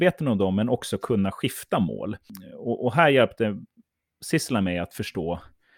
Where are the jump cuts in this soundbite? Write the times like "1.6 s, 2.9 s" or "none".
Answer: none